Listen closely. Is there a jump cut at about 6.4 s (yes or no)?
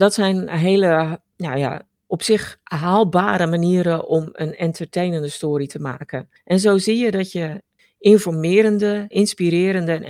no